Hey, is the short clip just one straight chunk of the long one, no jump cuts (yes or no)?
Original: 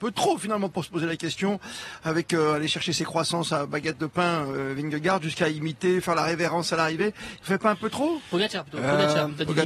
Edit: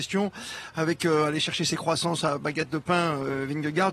yes